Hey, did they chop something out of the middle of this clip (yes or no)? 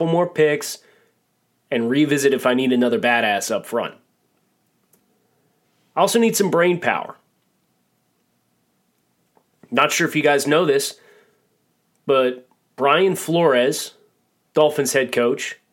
no